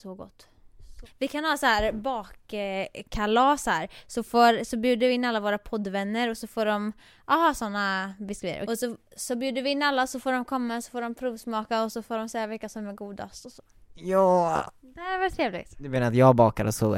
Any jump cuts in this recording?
yes; 2 cuts; at 1.1 s, 8.7 s

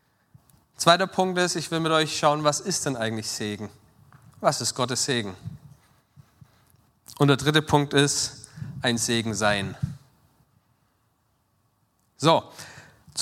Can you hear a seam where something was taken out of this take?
no; 0 cuts

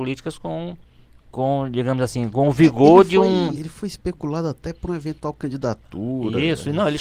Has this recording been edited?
yes; 1 cut; at 3.5 s

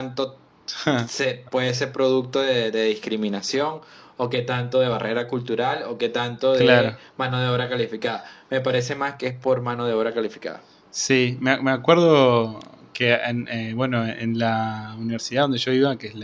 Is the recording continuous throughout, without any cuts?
yes; 0 cuts

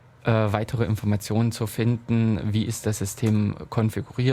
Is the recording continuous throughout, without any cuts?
yes; 0 cuts

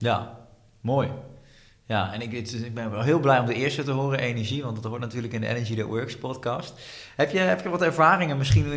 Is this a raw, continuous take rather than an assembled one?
yes; 0 cuts

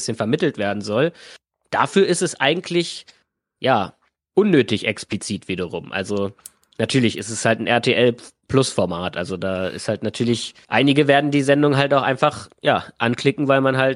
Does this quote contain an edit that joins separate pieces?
no; 0 cuts

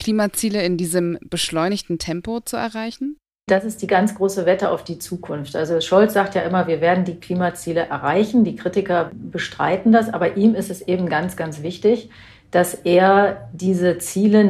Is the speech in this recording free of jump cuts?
yes; 0 cuts

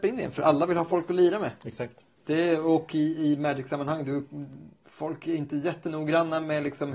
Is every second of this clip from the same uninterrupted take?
yes; 0 cuts

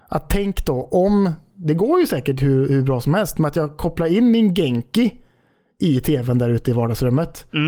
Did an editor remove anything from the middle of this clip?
no; 0 cuts

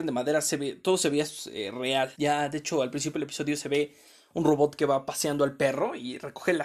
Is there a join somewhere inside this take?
yes; 1 cut; at 2.1 s

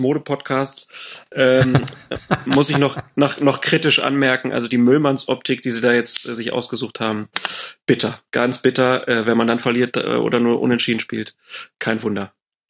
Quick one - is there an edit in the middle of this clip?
no; 0 cuts

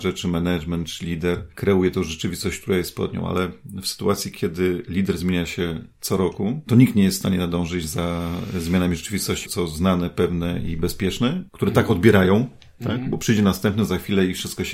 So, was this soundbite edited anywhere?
yes; 2 cuts; at 9.4 s, 11.5 s

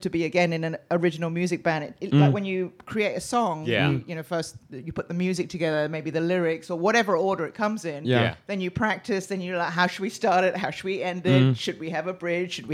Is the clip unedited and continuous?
yes; 0 cuts

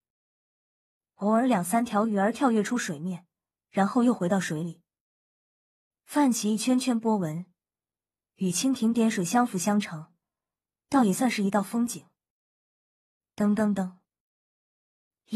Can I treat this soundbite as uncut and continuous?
yes; 0 cuts

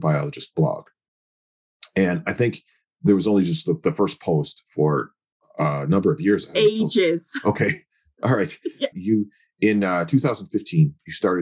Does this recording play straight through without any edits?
no; 1 cut; at 8.9 s

